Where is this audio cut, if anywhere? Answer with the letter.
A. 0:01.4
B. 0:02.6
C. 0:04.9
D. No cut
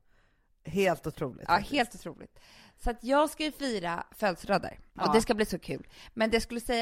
C